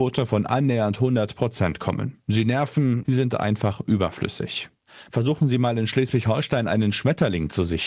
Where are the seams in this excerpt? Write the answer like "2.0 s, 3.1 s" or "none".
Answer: 3.0 s, 5.1 s